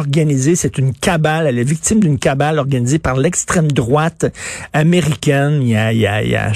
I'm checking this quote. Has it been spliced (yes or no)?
no